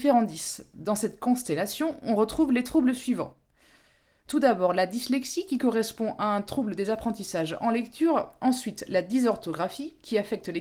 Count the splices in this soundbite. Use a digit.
0